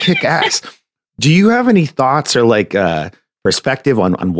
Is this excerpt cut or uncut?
uncut